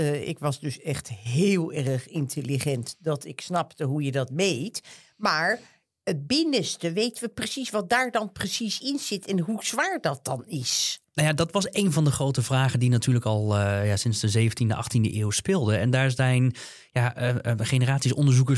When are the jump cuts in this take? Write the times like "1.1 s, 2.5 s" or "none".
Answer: none